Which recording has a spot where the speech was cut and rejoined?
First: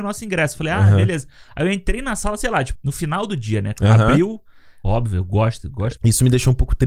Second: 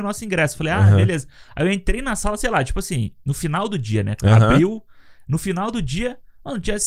first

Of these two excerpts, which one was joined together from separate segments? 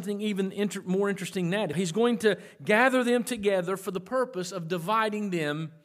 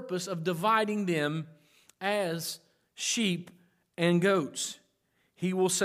first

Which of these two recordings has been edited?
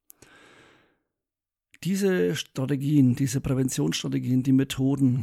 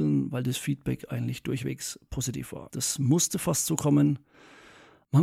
second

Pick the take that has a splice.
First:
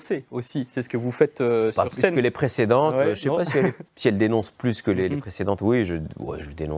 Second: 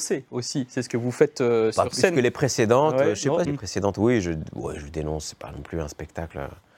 second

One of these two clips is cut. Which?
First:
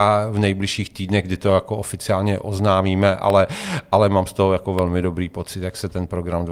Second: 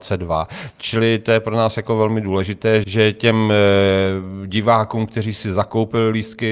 second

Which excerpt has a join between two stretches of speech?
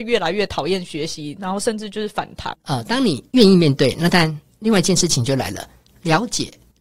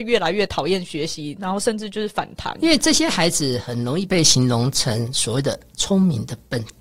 first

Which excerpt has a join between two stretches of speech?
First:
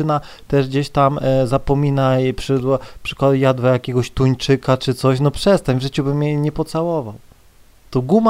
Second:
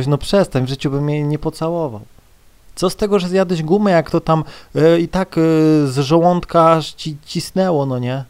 second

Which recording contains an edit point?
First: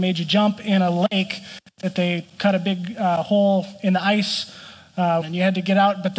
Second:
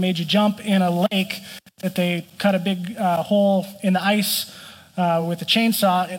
first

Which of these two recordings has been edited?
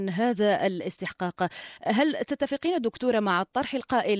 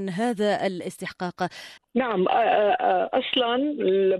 second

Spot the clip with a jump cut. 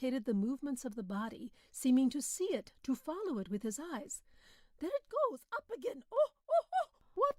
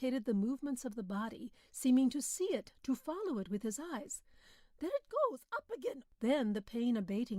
second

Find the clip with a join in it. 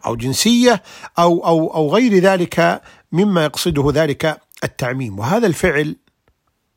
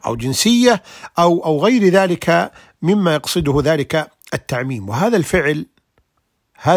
second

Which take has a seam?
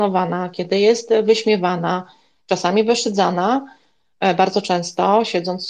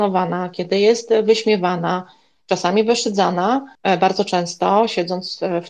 second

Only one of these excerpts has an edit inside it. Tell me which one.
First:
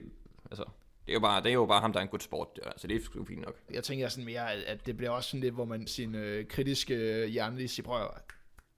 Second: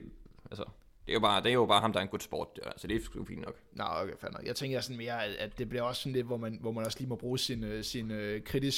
first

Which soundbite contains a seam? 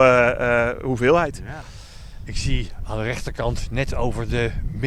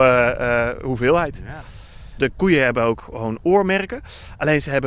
second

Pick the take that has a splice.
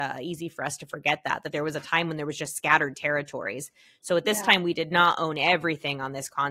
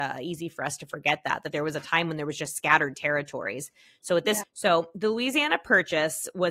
second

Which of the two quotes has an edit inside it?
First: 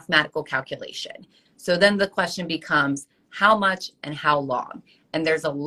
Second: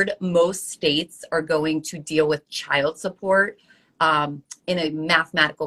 first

